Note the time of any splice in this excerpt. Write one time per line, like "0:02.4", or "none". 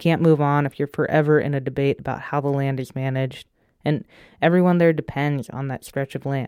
none